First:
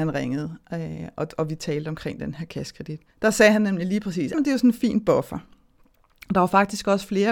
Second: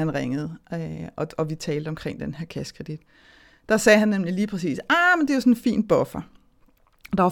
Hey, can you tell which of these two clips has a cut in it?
first; 2 cuts; at 3.1 s, 4.3 s

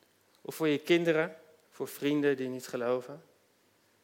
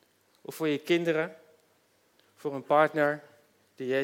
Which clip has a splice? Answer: first; 1 cut; at 1.6 s

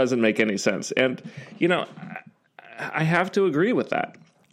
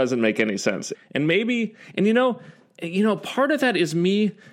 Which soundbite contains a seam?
second; 1 cut; at 0.9 s

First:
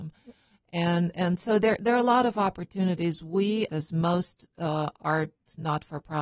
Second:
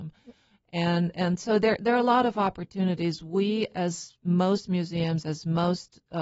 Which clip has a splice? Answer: first; 1 cut; at 3.7 s

